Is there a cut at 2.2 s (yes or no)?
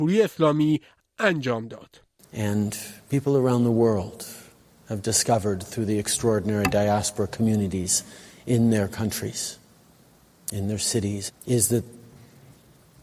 yes